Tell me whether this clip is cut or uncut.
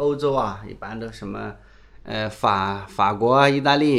uncut